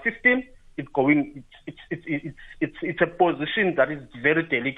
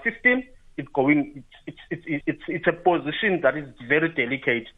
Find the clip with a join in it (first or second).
second